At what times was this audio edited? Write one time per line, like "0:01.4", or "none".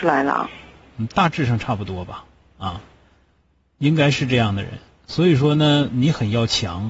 none

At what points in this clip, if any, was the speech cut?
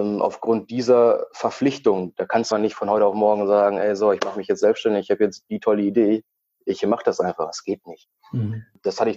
0:02.5

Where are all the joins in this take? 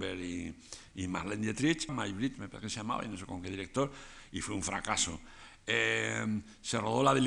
0:01.9

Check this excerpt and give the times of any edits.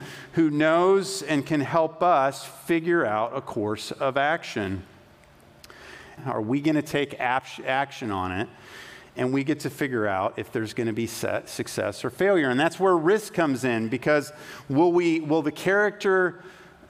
0:06.2

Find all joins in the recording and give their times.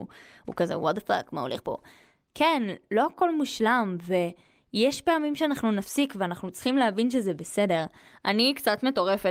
none

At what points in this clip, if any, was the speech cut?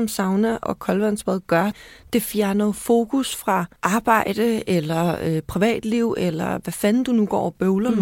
0:03.8

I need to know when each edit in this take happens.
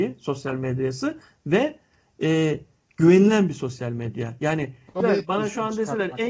0:05.0

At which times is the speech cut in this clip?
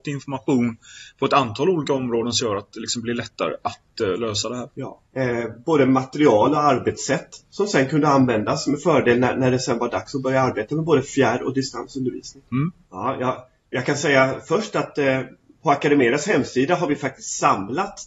0:12.9

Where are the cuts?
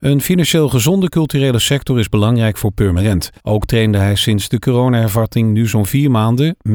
0:03.4

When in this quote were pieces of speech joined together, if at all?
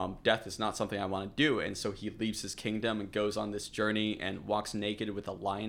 none

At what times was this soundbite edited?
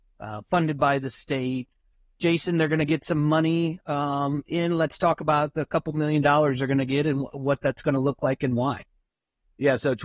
none

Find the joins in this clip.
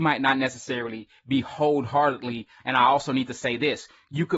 0:02.6

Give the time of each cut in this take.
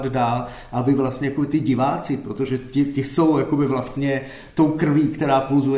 none

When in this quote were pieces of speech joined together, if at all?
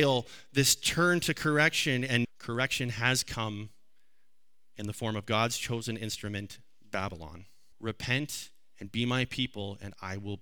0:02.2
0:07.7

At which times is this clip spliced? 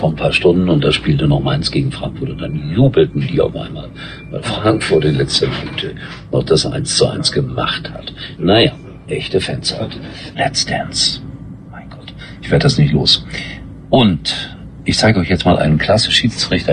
0:08.4
0:10.3

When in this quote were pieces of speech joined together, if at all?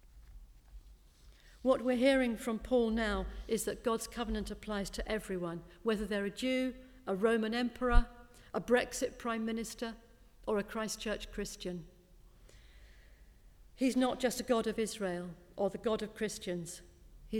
none

